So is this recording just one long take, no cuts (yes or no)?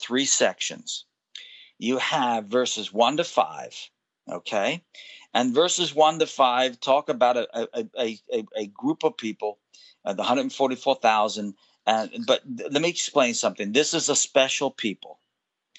yes